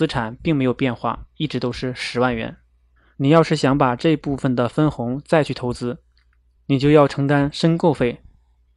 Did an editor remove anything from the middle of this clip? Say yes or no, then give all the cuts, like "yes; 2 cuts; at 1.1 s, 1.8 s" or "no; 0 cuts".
yes; 1 cut; at 3.1 s